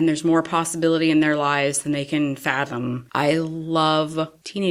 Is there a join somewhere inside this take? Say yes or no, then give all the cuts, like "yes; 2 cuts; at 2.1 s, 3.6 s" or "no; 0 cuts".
yes; 1 cut; at 3.1 s